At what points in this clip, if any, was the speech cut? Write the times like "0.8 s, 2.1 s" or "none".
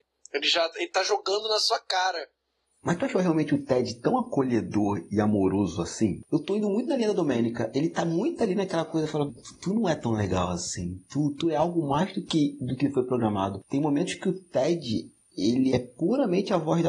9.3 s, 15.7 s